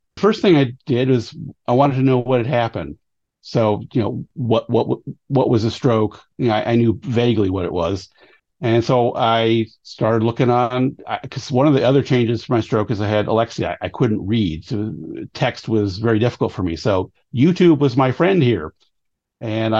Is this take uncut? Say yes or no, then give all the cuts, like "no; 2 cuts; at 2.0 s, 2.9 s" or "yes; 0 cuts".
no; 1 cut; at 8.4 s